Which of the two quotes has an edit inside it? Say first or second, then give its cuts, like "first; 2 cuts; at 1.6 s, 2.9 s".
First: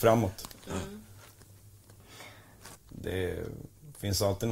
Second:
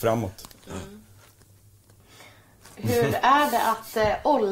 first; 1 cut; at 2.8 s